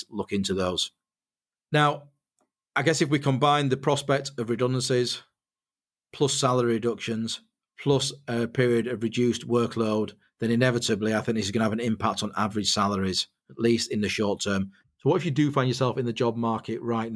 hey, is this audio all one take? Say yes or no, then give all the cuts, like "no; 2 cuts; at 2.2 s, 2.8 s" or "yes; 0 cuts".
no; 1 cut; at 14.8 s